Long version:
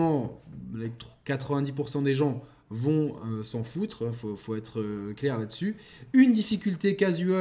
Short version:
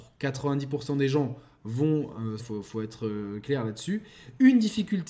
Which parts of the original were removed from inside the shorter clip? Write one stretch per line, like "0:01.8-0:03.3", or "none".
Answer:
0:03.4-0:04.1